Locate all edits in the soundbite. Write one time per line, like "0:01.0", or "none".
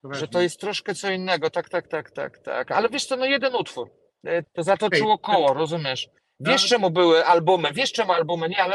0:04.4